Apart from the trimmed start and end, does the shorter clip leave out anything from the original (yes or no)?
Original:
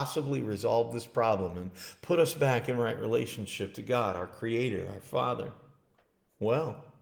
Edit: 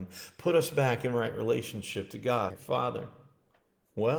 yes